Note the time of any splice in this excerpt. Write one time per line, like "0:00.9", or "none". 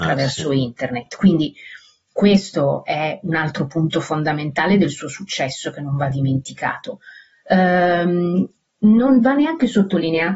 none

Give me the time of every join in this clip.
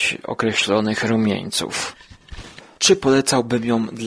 0:02.8

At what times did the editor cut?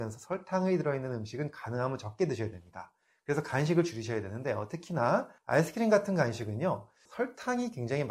0:05.4
0:07.1

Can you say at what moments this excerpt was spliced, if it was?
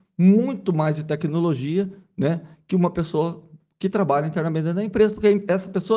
none

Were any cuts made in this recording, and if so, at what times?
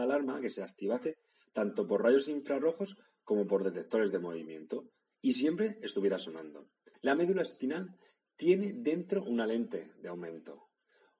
0:06.9

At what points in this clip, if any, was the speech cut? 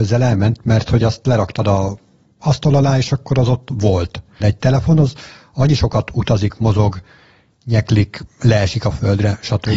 0:04.4

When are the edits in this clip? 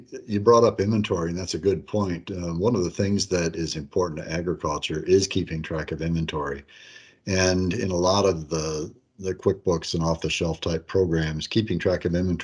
none

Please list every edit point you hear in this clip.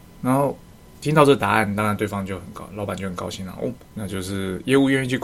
0:03.8

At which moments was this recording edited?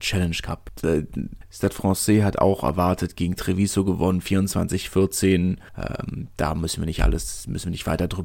0:01.5
0:05.7

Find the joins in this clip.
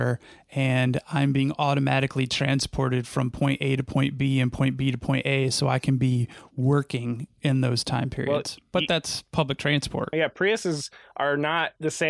0:10.1

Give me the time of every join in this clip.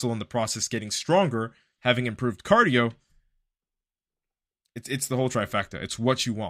0:01.8

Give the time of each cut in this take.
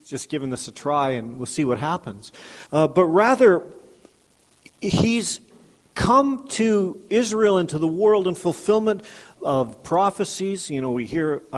0:02.7
0:09.4

